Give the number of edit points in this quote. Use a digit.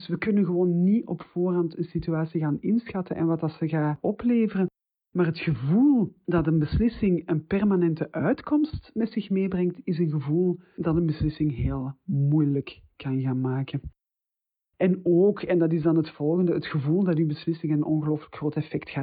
0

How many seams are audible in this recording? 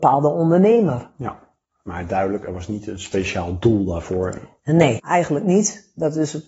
1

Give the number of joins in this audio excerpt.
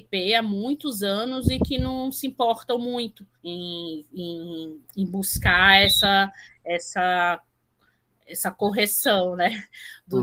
1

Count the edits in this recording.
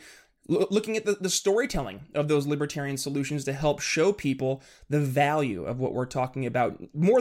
0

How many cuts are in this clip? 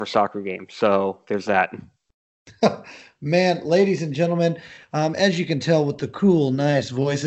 0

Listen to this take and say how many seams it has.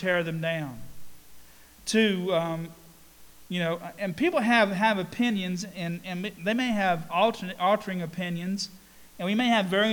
0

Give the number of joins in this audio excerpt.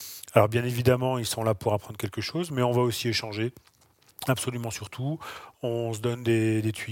0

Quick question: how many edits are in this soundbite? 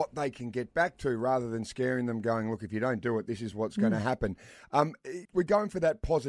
1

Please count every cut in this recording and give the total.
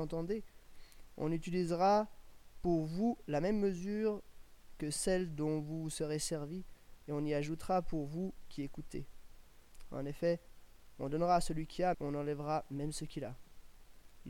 1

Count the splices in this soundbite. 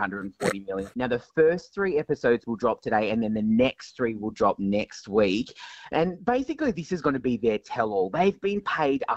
1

